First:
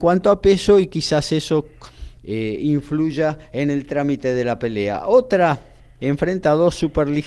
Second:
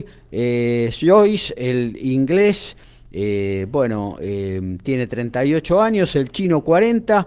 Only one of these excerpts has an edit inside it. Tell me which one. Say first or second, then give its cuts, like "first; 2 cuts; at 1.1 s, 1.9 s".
first; 1 cut; at 6.0 s